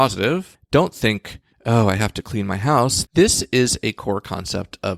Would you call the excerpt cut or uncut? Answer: cut